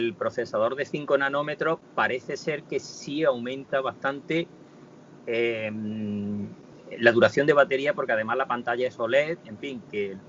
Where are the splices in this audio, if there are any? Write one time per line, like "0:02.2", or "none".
none